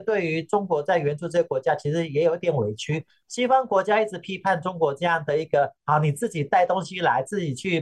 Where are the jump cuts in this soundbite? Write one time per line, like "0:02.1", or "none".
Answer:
0:03.2